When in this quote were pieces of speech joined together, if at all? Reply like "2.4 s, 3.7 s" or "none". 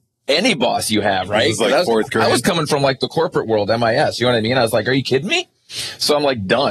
none